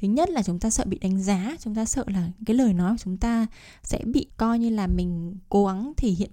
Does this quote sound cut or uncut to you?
cut